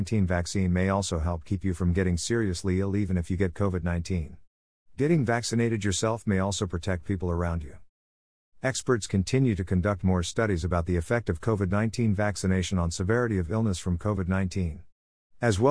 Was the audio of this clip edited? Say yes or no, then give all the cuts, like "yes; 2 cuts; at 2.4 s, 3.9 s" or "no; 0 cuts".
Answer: no; 0 cuts